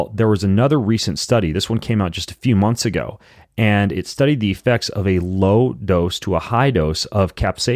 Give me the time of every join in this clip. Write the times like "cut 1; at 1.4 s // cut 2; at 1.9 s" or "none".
none